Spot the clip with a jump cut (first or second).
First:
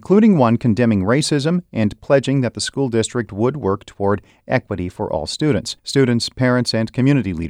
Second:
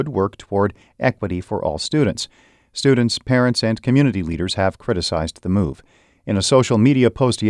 first